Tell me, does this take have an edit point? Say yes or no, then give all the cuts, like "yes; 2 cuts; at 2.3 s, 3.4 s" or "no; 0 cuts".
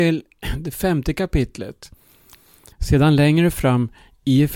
yes; 1 cut; at 2.7 s